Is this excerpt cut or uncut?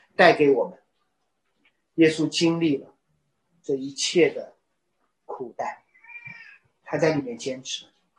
uncut